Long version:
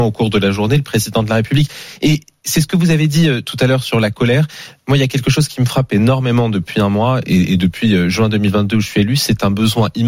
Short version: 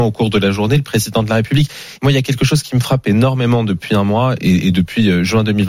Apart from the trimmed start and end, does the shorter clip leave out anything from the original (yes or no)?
yes